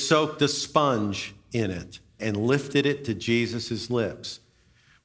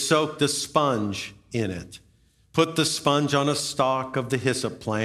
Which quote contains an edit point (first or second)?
first